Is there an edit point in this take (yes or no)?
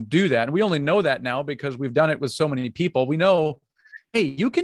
no